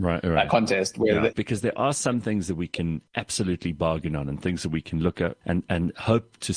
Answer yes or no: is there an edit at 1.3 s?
yes